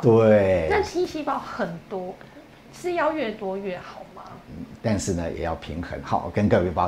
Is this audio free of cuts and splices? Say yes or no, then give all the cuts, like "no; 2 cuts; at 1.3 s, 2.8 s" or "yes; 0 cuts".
no; 1 cut; at 4.8 s